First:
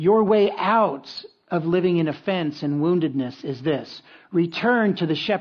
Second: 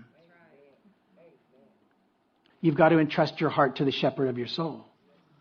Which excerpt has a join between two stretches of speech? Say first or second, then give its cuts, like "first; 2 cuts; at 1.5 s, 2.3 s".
second; 1 cut; at 2.5 s